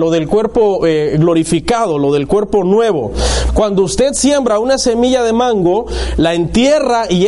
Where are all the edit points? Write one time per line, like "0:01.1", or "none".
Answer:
0:03.5